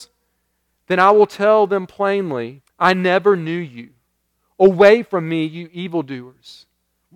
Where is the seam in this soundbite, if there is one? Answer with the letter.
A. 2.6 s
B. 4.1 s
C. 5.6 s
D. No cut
A